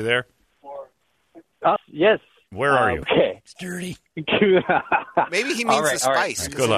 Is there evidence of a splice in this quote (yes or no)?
yes